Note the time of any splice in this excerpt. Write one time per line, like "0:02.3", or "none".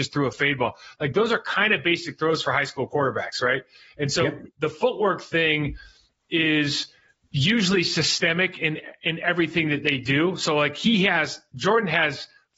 none